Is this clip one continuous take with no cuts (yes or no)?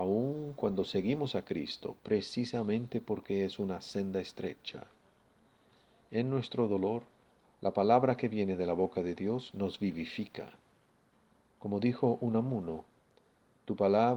yes